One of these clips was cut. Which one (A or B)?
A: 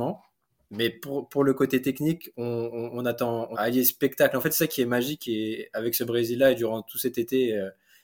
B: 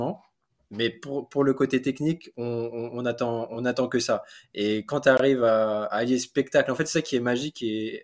A